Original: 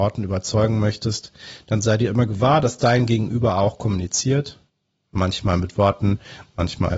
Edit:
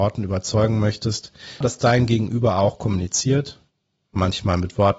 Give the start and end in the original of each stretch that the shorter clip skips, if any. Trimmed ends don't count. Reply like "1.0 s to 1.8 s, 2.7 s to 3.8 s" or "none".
1.6 s to 2.6 s